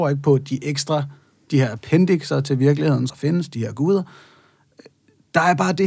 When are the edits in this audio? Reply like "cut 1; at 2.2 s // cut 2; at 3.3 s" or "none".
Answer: cut 1; at 3.1 s